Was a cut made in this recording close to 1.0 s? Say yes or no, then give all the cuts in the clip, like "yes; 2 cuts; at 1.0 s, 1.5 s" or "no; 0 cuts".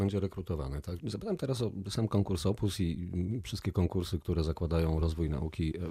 yes; 1 cut; at 1.0 s